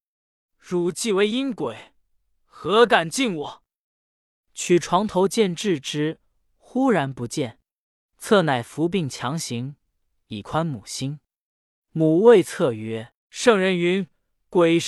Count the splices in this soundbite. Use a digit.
1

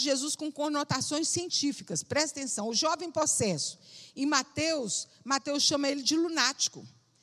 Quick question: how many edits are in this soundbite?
0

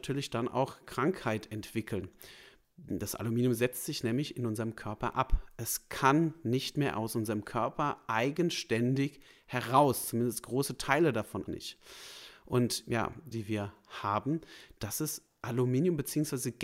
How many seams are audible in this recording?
2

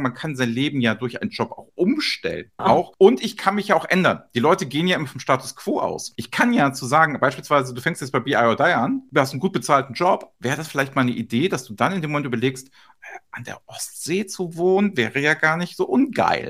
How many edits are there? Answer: 1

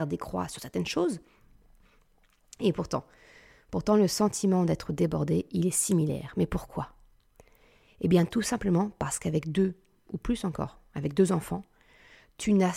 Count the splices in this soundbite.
1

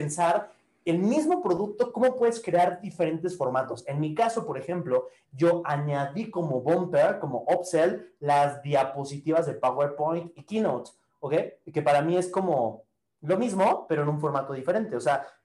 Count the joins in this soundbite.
1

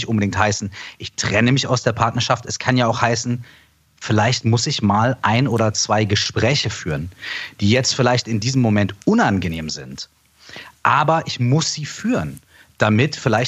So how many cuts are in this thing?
0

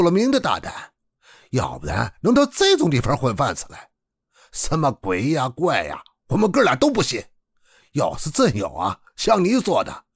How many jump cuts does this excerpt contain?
0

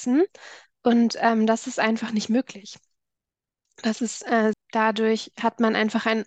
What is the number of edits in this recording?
1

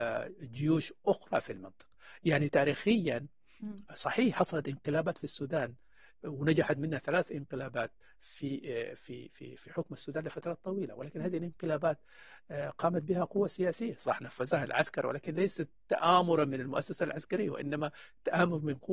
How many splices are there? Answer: 0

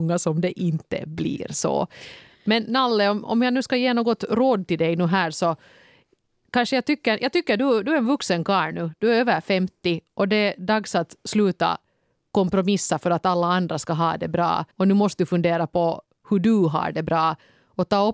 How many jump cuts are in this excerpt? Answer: 1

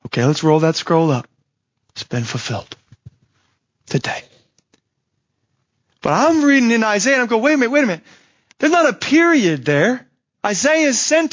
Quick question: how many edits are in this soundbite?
1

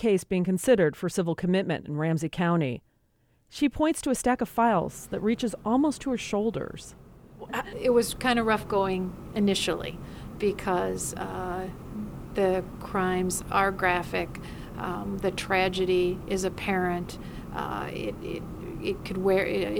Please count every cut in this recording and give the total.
1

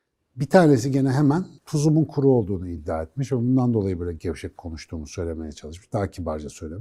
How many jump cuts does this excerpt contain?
1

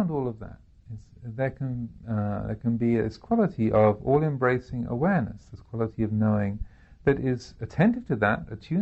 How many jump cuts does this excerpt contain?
0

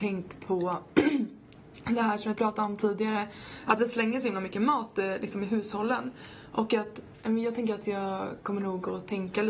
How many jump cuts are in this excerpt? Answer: 0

